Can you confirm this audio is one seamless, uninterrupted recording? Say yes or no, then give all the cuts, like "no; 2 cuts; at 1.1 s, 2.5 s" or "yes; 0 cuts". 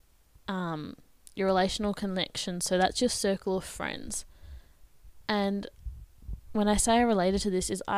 yes; 0 cuts